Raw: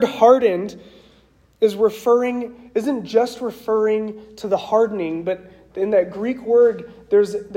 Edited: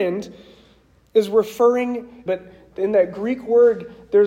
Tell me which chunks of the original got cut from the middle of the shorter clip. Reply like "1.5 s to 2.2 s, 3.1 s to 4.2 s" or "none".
2.7 s to 5.2 s